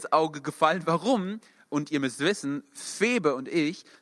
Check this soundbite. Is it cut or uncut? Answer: cut